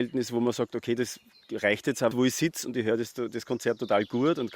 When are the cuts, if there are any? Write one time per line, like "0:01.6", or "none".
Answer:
0:02.1